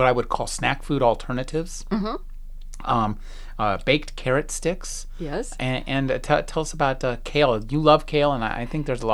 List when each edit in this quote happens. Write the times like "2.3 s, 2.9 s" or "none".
none